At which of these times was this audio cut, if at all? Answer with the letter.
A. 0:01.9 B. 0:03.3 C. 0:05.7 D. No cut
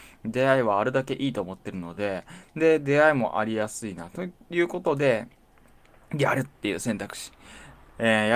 D